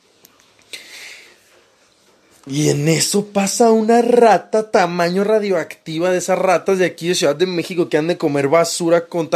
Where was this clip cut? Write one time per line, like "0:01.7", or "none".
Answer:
none

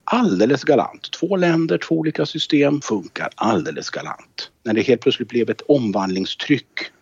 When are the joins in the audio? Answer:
0:02.8
0:04.5

